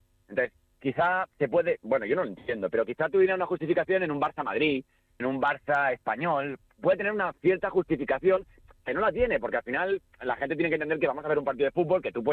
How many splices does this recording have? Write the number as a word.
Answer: two